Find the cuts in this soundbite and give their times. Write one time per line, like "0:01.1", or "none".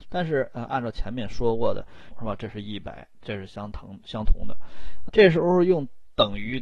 0:02.1
0:05.1